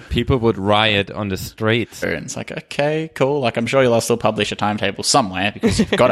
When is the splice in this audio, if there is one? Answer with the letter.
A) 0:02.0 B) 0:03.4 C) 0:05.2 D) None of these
A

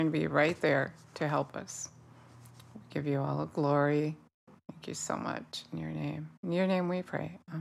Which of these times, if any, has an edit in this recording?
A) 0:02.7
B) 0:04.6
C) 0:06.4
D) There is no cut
C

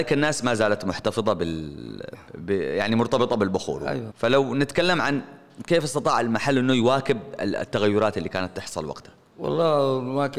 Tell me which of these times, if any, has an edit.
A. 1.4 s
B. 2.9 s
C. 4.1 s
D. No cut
C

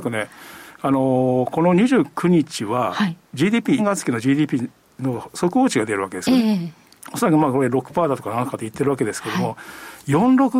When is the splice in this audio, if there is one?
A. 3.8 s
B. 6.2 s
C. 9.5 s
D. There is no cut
A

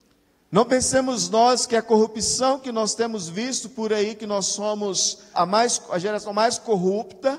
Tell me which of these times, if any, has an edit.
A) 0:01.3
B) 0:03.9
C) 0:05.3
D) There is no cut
C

